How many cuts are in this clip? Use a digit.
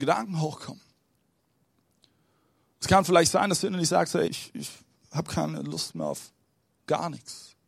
1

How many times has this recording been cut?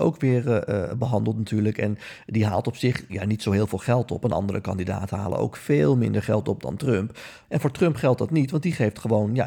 1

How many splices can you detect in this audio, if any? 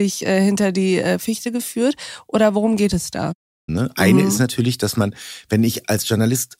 1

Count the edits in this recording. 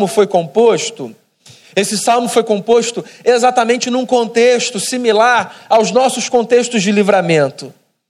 0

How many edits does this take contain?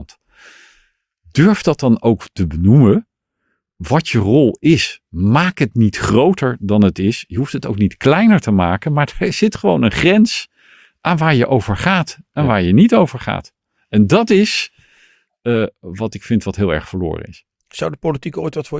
0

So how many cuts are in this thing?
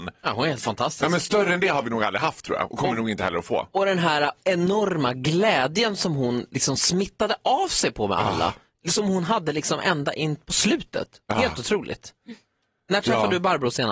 0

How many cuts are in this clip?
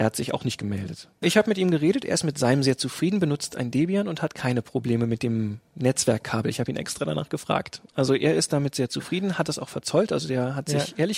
1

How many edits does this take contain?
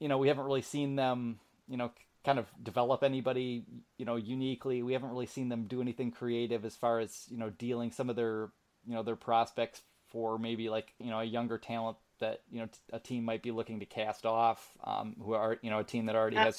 0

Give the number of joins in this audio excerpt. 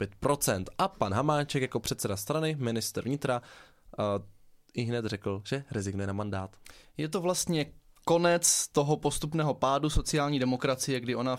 0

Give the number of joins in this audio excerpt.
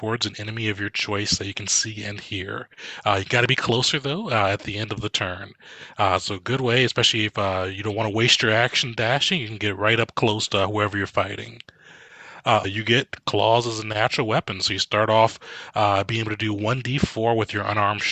1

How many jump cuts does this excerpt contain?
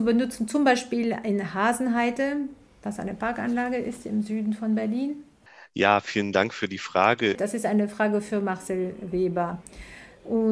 1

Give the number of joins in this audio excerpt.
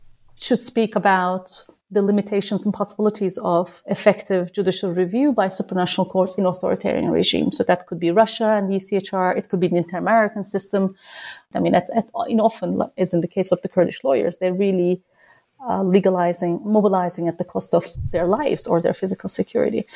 1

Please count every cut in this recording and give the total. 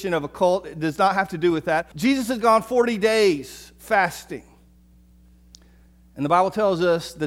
1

